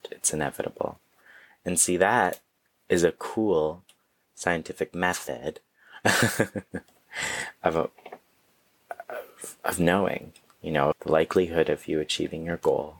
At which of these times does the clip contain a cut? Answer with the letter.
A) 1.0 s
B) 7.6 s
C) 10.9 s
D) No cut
C